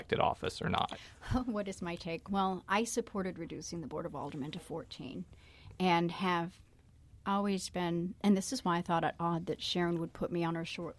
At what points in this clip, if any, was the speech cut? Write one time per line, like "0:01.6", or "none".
none